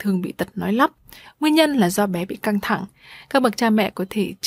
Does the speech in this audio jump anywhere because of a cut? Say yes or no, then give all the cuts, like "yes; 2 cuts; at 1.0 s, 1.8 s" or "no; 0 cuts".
no; 0 cuts